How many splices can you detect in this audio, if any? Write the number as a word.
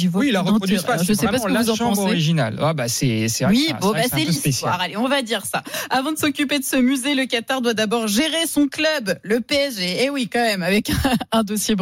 zero